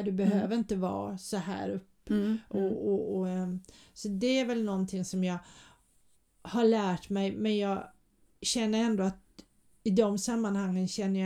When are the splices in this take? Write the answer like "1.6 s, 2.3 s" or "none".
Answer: none